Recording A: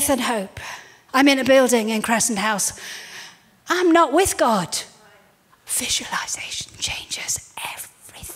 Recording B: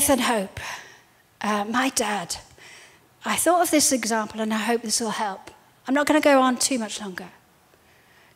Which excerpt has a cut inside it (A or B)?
A